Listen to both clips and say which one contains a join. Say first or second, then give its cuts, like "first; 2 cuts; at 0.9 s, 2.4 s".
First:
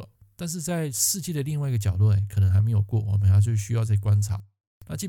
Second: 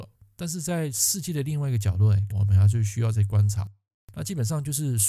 second; 1 cut; at 2.3 s